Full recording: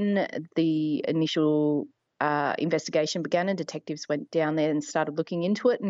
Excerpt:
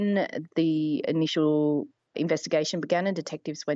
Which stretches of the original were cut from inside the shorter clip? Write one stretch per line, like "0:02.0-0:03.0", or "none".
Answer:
0:02.1-0:02.6